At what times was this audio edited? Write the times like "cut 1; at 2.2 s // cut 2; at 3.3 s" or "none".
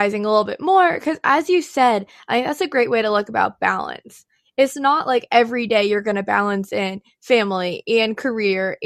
none